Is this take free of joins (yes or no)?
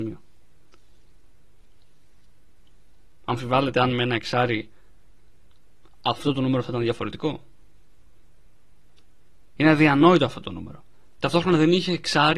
no